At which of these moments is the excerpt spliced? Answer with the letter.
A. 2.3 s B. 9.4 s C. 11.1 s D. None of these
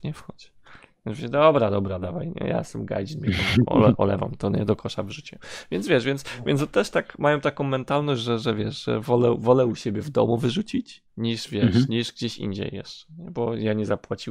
C